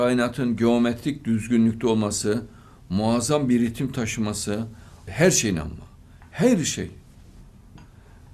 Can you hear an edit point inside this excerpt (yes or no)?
yes